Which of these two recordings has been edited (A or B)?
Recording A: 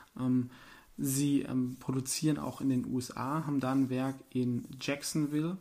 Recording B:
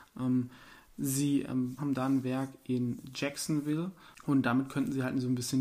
B